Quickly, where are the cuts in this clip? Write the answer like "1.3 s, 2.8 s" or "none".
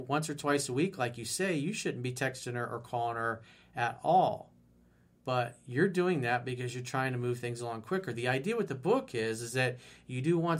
none